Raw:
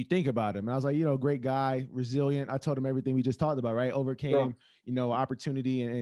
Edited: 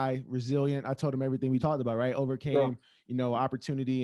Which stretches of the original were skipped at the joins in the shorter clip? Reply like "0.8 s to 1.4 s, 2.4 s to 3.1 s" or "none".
3.2 s to 3.4 s